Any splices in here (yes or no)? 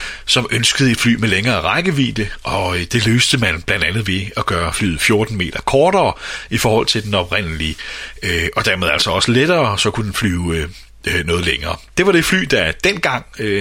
no